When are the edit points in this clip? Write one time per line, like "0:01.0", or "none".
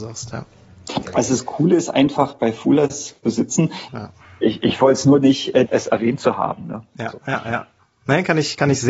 0:03.9
0:05.7